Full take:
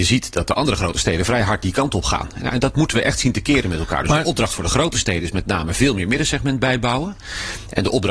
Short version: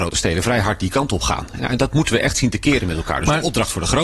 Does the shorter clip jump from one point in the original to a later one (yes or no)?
no